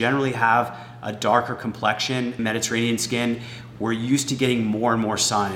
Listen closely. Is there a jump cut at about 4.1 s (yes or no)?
no